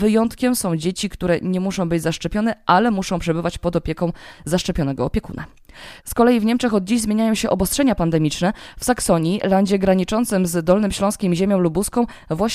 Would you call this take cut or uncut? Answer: uncut